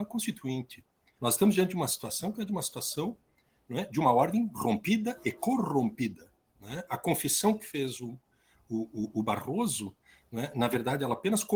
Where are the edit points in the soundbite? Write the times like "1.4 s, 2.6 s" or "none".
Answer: 1.2 s